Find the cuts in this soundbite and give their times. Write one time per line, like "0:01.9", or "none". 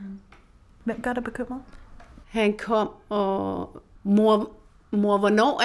0:02.2
0:03.9